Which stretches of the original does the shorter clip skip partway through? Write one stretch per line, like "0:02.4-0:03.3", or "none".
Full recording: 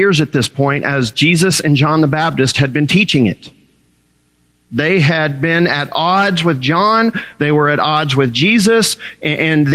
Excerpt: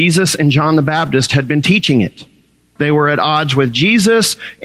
0:04.0-0:07.4